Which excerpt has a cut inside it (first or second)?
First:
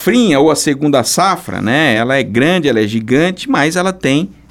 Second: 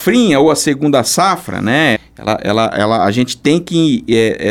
second